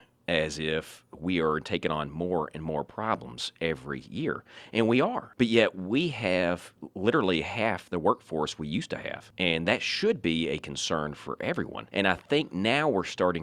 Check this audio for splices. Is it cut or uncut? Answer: uncut